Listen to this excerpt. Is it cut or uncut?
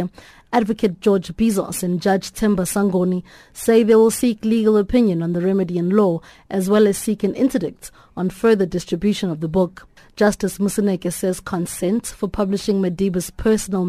uncut